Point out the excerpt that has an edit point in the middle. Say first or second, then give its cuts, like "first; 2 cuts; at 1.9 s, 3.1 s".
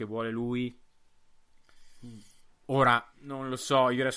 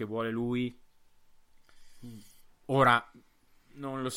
first; 1 cut; at 3.1 s